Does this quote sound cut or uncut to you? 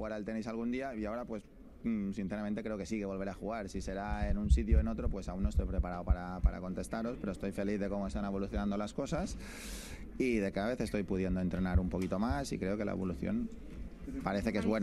uncut